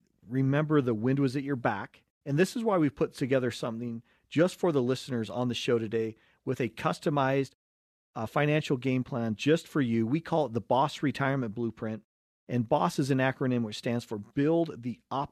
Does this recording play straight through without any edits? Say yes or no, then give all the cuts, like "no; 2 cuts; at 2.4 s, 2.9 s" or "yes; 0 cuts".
no; 1 cut; at 2.2 s